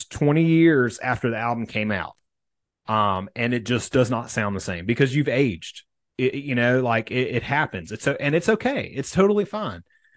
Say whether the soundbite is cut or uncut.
uncut